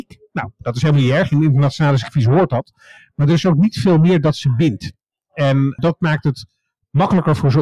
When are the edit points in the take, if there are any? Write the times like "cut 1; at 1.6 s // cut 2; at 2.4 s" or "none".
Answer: none